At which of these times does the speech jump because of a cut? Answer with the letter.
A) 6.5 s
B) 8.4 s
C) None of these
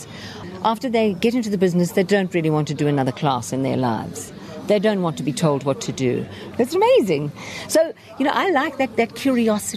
A